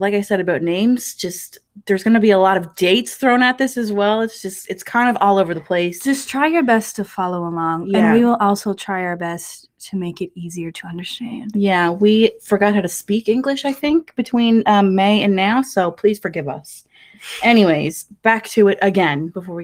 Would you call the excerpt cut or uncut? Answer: uncut